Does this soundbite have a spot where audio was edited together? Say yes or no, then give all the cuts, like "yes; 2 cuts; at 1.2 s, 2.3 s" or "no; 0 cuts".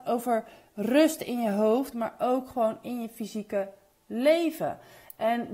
yes; 1 cut; at 1.9 s